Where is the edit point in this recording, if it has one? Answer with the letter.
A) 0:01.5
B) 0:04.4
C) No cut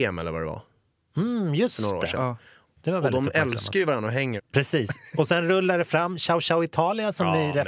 B